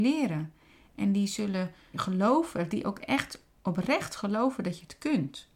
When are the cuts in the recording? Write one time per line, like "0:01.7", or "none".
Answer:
0:01.9